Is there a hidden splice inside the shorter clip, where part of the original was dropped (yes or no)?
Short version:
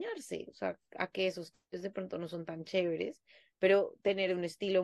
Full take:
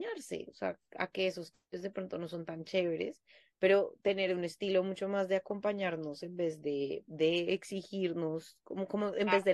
no